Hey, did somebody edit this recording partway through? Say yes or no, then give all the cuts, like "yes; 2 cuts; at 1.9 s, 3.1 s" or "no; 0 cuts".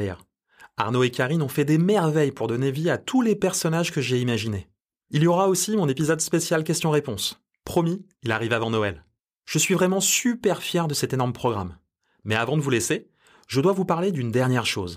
yes; 1 cut; at 5.0 s